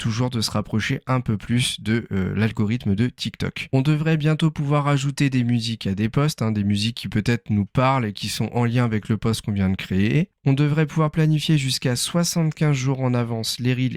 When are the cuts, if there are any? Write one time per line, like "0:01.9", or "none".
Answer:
none